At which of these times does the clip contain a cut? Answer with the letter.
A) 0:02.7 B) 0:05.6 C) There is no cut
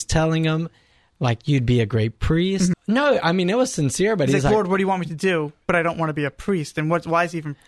A